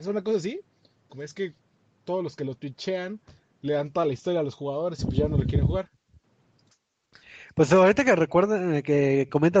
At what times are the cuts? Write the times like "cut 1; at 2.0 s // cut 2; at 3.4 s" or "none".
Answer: cut 1; at 1.1 s